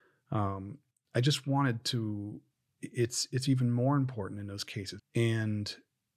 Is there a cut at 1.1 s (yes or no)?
no